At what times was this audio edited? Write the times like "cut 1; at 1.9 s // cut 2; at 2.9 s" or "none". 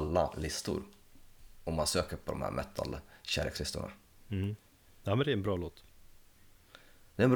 none